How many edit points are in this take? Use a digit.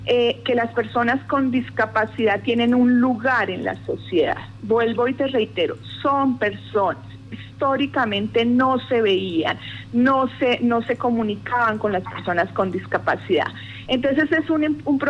1